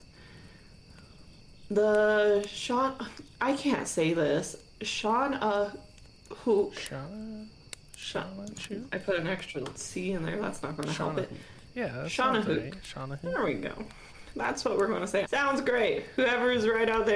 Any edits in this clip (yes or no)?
yes